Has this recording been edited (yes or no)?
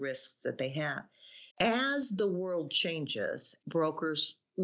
yes